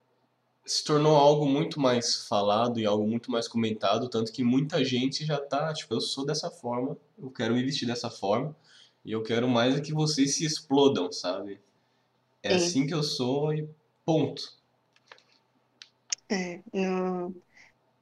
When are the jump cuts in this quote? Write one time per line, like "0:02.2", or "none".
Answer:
0:05.9